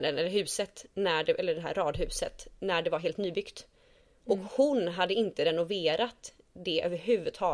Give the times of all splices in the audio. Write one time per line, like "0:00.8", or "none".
none